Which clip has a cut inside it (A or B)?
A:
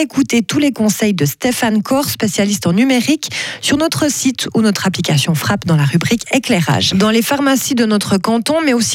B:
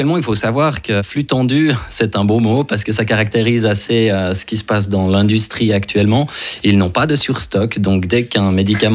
A